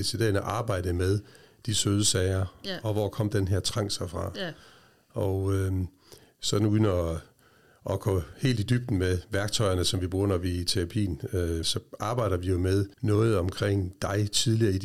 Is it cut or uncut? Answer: cut